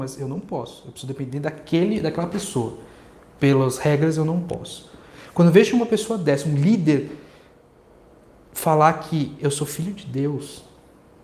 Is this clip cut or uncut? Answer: uncut